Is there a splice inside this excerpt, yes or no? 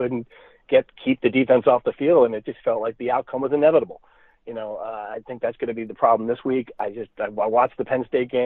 no